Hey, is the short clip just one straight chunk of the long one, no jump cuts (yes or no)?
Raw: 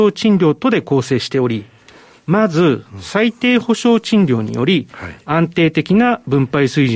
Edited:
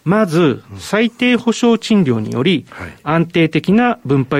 yes